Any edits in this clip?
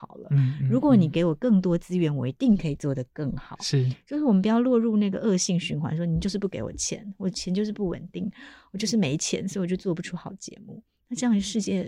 no; 0 cuts

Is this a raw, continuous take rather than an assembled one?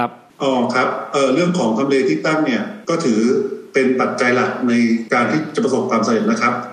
yes; 0 cuts

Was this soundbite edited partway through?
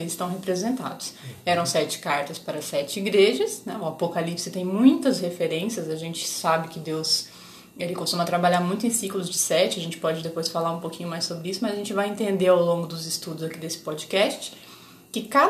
no; 0 cuts

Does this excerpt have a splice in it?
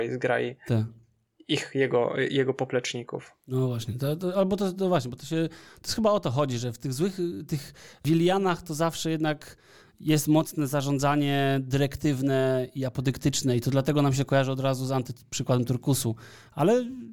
no; 0 cuts

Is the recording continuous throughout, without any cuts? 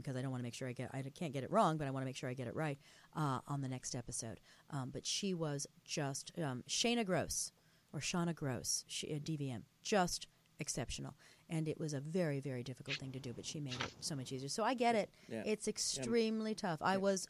yes; 0 cuts

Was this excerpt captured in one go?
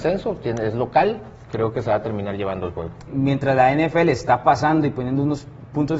no; 1 cut; at 3.1 s

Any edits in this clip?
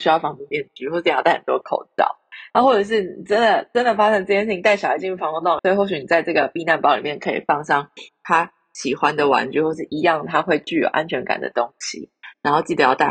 yes; 1 cut; at 5.6 s

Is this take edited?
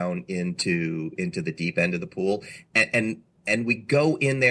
no; 0 cuts

